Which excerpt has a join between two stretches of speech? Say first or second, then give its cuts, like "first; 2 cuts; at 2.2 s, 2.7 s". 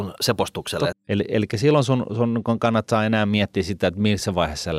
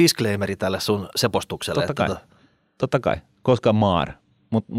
first; 1 cut; at 0.9 s